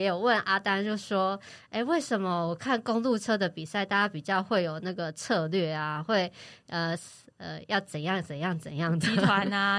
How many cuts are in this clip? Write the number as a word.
zero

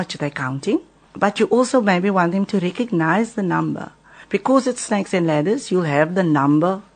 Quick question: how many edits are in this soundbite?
zero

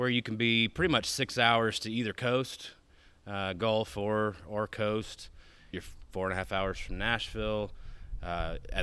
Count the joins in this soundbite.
one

